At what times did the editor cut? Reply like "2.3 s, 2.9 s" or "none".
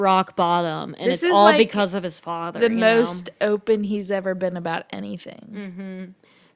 none